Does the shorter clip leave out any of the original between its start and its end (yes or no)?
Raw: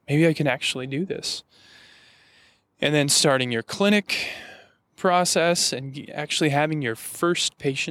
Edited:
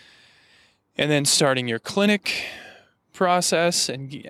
no